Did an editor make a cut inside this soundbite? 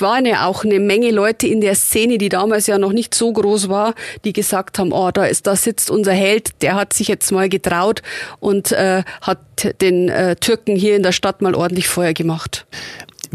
no; 0 cuts

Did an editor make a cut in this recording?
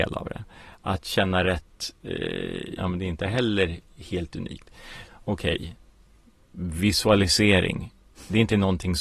yes; 2 cuts; at 2.8 s, 5.1 s

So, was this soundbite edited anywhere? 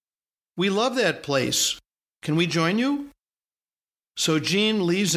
no; 0 cuts

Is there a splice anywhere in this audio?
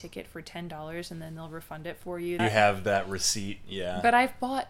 yes; 1 cut; at 2.4 s

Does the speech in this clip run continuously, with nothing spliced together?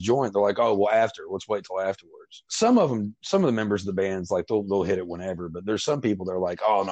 yes; 0 cuts

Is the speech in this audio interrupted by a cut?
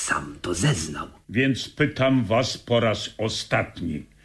yes; 1 cut; at 1.2 s

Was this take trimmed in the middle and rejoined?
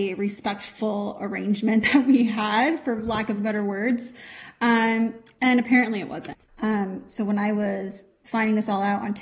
yes; 1 cut; at 6.5 s

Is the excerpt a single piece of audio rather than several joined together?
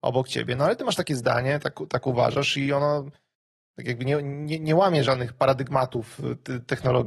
yes; 0 cuts

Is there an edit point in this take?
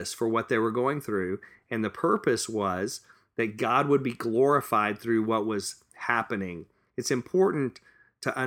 no; 0 cuts

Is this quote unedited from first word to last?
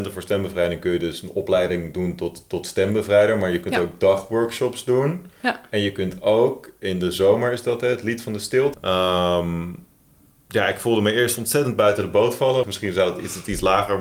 no; 2 cuts; at 8.7 s, 12.6 s

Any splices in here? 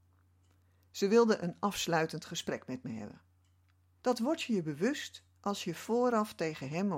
yes; 1 cut; at 4.0 s

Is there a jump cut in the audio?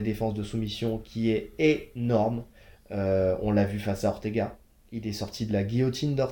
no; 0 cuts

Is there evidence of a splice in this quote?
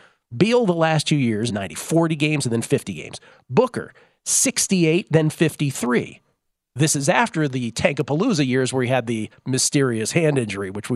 yes; 1 cut; at 1.5 s

